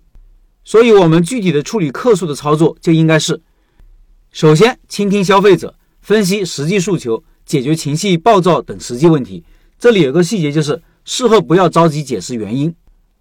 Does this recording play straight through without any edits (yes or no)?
yes